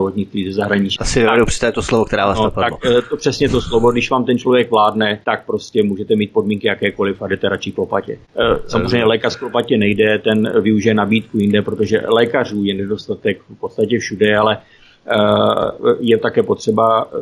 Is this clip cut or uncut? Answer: cut